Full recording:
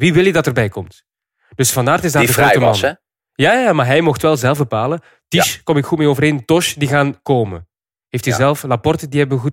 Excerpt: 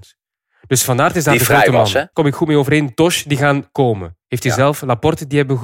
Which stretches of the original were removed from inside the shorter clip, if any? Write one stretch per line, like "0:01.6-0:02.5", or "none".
0:03.0-0:05.6
0:07.7-0:08.0